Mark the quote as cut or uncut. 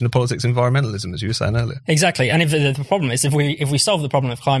uncut